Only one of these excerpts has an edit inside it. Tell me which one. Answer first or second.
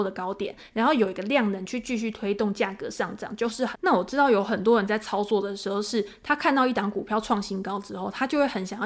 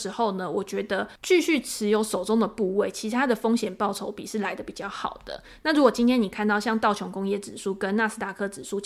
first